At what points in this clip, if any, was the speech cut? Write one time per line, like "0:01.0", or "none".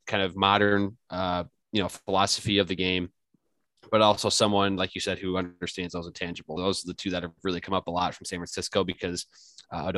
0:06.6